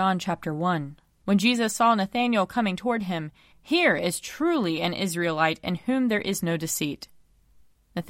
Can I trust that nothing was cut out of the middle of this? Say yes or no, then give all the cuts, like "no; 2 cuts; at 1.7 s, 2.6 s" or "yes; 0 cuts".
no; 2 cuts; at 1.2 s, 3.5 s